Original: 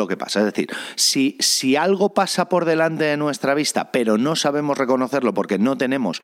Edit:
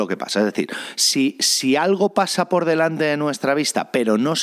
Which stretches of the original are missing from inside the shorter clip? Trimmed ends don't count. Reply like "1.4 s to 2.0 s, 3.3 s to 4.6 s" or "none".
none